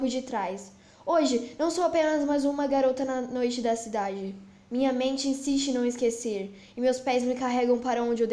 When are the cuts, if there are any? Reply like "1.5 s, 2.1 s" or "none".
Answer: none